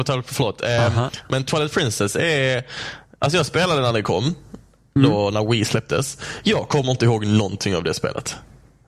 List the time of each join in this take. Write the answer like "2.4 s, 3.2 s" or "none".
none